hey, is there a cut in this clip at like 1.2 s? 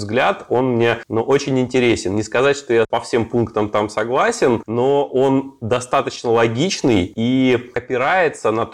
no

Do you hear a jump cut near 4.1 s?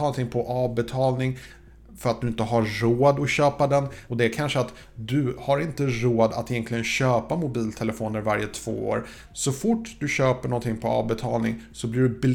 yes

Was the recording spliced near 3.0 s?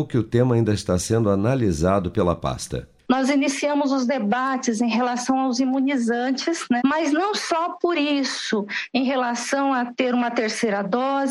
no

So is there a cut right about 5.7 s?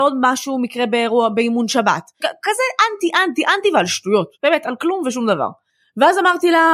no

